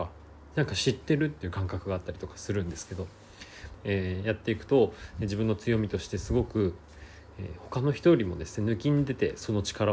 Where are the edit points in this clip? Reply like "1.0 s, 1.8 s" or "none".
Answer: 3.7 s